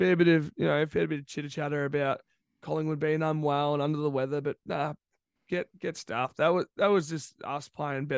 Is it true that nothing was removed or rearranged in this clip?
yes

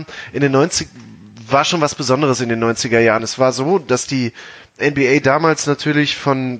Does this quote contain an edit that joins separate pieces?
no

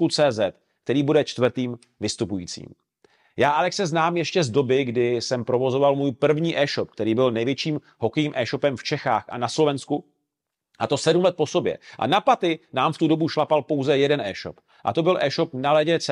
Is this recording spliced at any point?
no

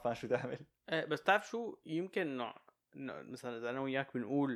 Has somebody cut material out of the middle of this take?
no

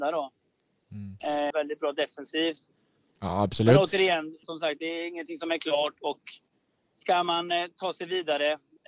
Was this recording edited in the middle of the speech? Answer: yes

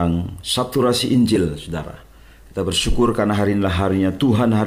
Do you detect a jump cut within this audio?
no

